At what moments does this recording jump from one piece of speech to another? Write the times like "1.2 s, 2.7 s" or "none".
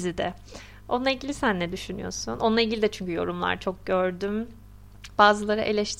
none

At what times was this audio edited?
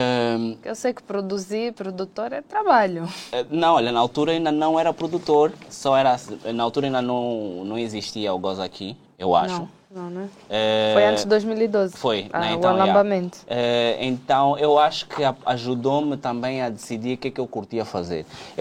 none

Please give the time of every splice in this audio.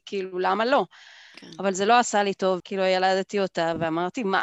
2.6 s

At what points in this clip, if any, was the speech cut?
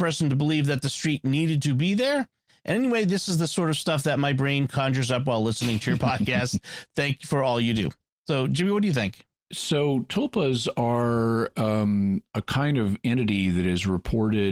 none

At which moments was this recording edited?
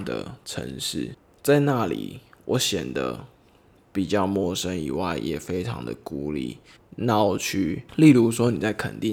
6.8 s

